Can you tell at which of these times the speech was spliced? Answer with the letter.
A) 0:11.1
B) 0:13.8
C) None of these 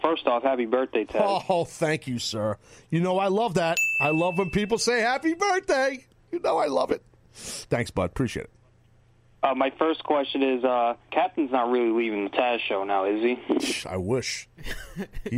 A